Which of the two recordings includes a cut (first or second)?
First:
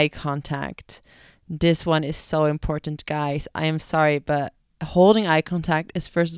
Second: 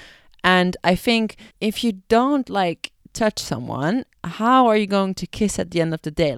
second